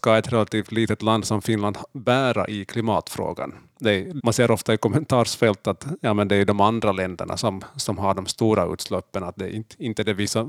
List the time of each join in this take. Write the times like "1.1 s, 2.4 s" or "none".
4.2 s